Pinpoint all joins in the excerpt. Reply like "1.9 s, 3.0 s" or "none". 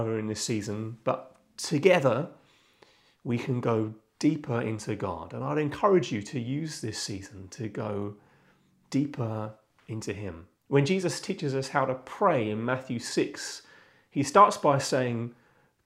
10.6 s